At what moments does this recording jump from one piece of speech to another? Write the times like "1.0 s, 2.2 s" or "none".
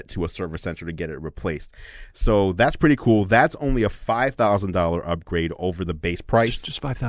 none